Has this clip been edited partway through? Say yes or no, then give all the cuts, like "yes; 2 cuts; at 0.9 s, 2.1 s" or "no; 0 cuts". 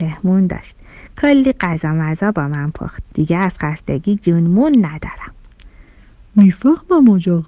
yes; 1 cut; at 3.1 s